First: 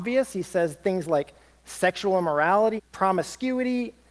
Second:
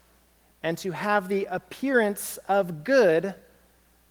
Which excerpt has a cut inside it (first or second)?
first